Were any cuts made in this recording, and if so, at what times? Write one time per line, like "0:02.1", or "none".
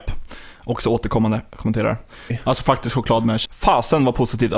0:02.3
0:03.4